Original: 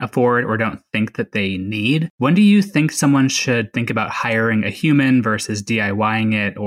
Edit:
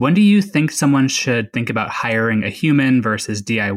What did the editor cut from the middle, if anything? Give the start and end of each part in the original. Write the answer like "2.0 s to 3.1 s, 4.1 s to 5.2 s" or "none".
none

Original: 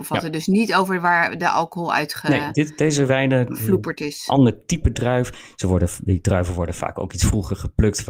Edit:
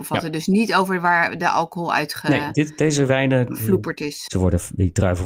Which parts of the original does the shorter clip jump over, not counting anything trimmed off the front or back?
4.3 s to 5.6 s

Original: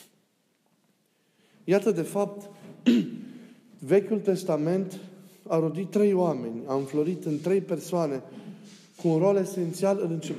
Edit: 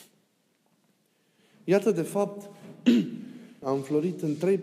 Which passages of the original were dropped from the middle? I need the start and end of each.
3.6 s to 6.7 s

